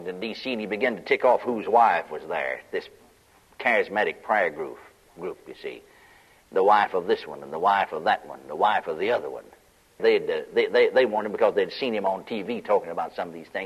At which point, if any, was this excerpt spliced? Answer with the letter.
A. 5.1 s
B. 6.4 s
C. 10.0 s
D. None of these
C